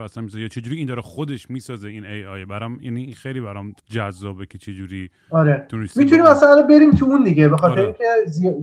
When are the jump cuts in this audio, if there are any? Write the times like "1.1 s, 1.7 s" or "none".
3.8 s